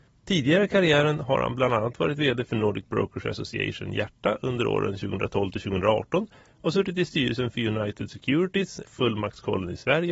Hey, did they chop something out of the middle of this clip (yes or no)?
yes